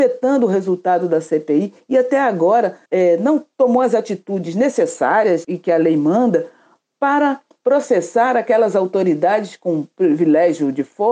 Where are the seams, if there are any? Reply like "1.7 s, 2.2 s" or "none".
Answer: 2.9 s, 5.4 s